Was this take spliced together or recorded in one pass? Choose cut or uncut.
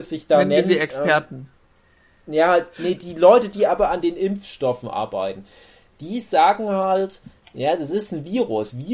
uncut